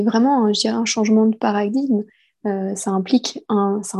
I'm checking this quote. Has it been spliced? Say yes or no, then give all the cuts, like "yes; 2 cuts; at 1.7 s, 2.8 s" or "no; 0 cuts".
yes; 1 cut; at 2.3 s